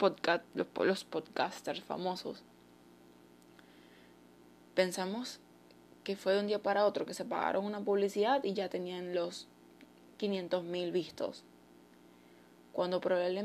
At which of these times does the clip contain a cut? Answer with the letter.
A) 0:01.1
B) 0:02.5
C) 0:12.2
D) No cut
D